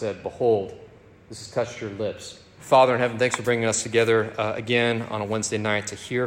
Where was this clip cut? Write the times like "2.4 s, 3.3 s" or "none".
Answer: 2.6 s

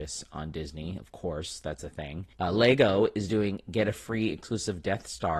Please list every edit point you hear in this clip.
2.3 s

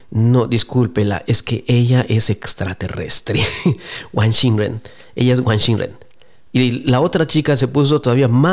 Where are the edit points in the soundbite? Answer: none

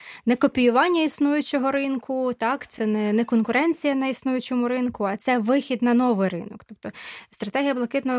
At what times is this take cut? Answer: none

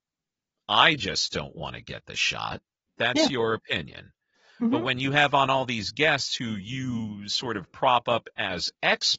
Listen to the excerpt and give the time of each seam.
2.9 s

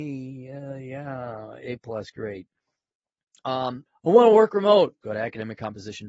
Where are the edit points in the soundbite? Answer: 3.9 s, 5.0 s

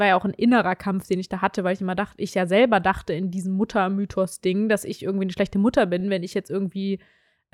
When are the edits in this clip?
none

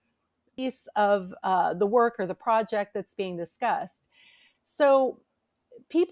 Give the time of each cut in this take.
4.5 s

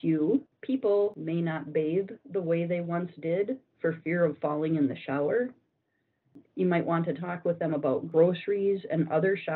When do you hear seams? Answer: 6.4 s

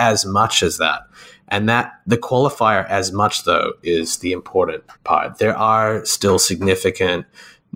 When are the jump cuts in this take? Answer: 4.9 s

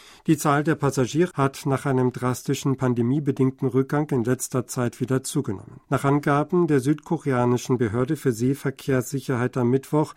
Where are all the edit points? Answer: 1.3 s, 5.8 s

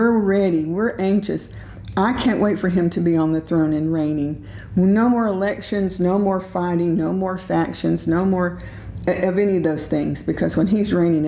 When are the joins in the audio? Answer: none

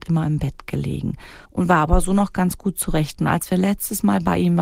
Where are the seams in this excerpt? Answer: 1.4 s

